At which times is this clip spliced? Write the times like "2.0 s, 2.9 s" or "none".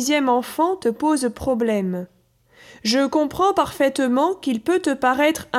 none